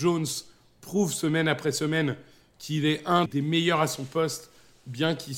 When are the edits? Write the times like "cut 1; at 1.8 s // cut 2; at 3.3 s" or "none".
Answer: cut 1; at 3.3 s